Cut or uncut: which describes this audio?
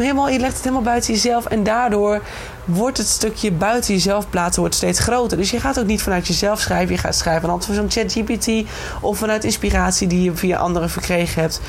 uncut